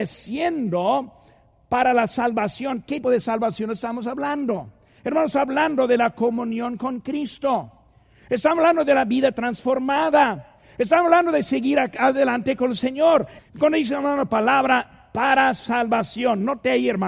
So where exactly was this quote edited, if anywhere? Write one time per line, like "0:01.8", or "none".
0:03.0
0:13.4